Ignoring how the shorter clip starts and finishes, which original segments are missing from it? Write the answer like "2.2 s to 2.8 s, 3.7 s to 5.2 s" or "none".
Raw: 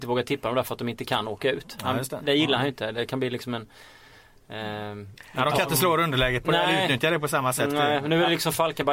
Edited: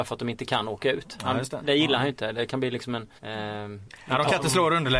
3.8 s to 4.4 s